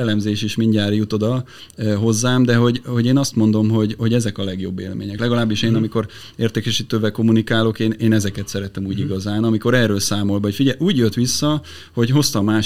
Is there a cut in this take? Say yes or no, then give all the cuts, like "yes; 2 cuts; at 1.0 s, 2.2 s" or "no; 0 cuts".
no; 0 cuts